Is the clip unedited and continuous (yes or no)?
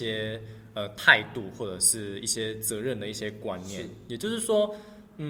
yes